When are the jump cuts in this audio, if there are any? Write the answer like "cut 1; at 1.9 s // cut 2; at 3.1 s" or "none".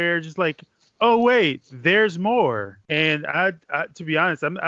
cut 1; at 2.8 s